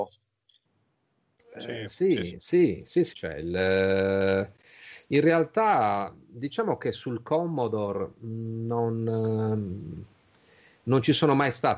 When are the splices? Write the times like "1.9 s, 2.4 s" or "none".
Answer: 3.1 s